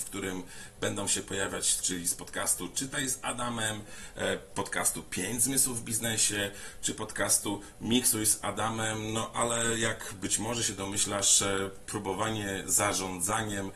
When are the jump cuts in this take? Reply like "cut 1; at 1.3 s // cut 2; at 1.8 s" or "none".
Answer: cut 1; at 1.8 s